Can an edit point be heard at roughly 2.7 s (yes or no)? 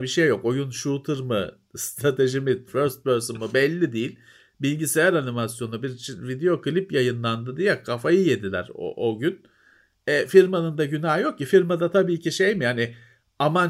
yes